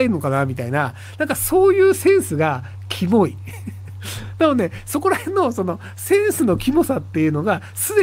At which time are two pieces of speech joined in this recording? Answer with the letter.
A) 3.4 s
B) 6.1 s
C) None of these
C